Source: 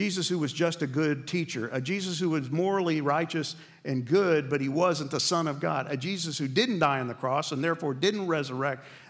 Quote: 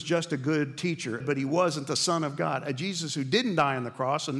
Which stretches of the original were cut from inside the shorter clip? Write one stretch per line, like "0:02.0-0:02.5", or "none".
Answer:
0:01.7-0:04.4